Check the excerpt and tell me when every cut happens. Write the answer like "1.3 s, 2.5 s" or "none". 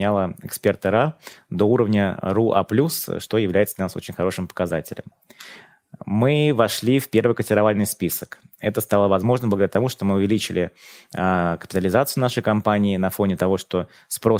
none